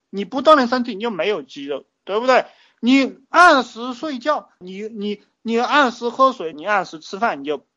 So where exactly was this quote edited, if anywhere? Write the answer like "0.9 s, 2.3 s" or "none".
4.6 s, 6.5 s